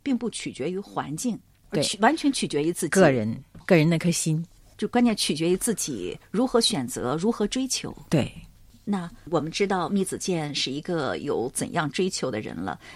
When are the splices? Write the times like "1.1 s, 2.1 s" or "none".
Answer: none